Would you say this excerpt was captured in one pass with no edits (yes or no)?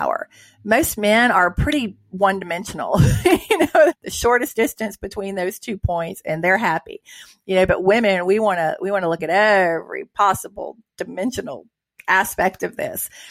no